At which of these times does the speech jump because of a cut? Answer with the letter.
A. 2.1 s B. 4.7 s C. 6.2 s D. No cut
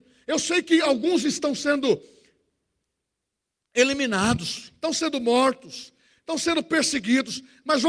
D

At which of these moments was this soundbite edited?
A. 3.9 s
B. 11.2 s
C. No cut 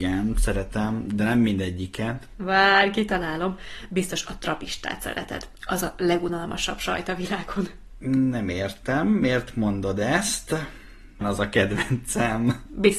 B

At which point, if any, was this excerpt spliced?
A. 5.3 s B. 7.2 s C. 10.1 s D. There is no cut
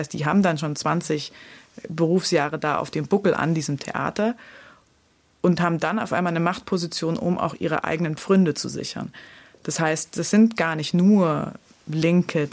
D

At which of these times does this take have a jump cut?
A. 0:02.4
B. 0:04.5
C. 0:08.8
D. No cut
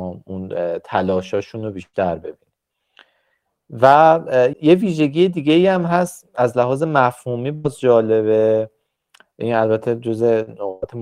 B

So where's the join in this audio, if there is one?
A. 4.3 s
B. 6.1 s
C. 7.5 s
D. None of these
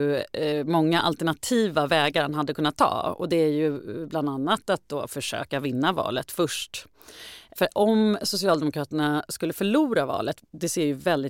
C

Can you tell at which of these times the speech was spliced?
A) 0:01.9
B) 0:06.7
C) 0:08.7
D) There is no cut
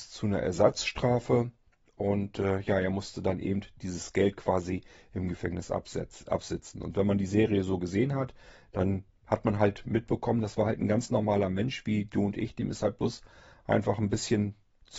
D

